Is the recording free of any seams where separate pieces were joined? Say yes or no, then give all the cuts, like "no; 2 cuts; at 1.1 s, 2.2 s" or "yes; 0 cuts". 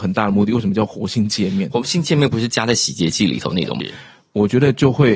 no; 1 cut; at 3.8 s